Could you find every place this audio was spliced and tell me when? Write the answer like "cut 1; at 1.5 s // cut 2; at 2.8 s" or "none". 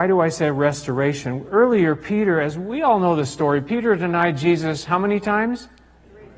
none